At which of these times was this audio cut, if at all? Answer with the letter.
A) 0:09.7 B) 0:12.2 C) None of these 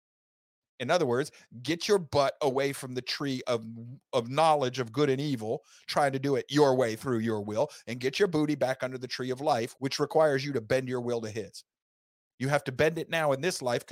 A